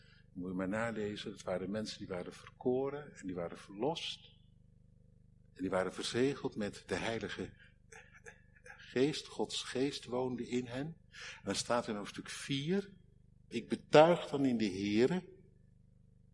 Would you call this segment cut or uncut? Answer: cut